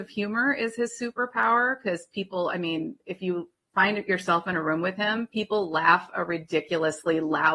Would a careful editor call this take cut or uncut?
uncut